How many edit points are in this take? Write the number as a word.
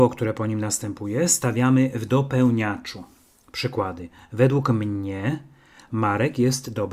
zero